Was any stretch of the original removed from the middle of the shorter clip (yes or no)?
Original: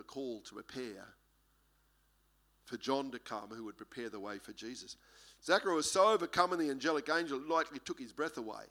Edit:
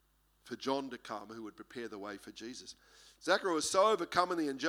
no